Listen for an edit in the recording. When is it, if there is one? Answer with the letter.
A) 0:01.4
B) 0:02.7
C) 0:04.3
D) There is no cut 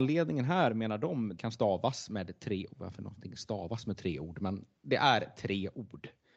A